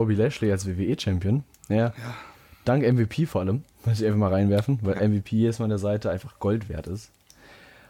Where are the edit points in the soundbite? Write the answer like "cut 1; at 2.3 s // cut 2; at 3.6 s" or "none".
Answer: cut 1; at 3.7 s